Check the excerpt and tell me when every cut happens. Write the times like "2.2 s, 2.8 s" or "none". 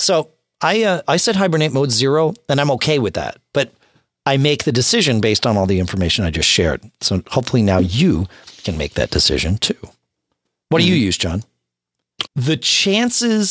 12.3 s